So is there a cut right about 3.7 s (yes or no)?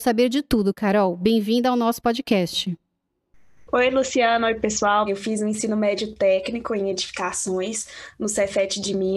no